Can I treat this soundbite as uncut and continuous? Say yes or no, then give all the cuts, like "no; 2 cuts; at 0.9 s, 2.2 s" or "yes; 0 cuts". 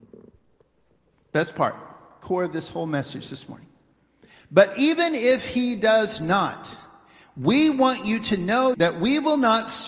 no; 1 cut; at 8.7 s